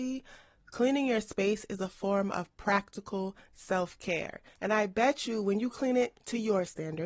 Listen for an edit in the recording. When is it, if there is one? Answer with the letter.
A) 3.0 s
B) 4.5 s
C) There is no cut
B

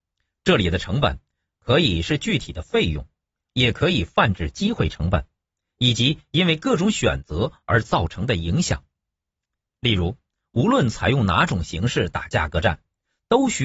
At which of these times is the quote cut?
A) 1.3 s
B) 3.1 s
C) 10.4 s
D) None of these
C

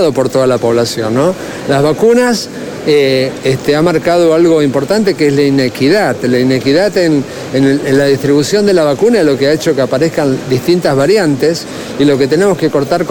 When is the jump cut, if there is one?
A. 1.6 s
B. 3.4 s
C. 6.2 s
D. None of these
B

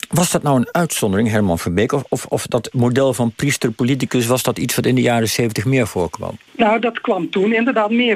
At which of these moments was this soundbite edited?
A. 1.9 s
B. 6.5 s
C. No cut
B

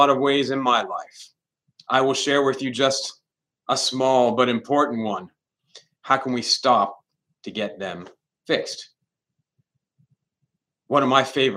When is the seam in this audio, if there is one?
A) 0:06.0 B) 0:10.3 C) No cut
A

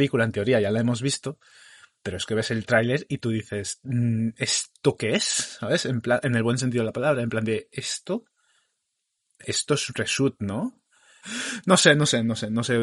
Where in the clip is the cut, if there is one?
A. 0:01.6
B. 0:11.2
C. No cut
B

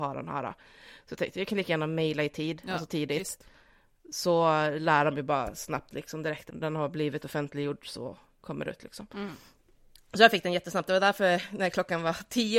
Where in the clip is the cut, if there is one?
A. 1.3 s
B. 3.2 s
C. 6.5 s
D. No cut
C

